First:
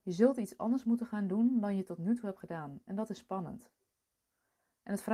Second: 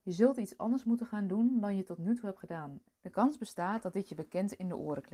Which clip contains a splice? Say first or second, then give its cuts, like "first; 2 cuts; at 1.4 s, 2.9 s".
second; 1 cut; at 2.8 s